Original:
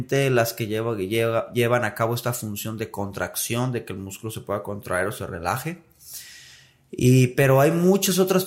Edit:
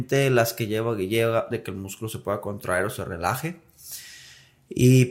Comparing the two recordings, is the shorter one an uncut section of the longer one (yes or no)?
no